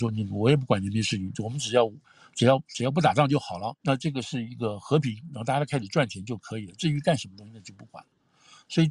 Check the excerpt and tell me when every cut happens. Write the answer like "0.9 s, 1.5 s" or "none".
3.8 s